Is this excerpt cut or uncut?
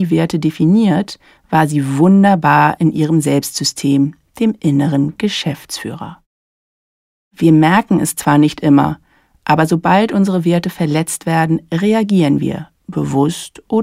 uncut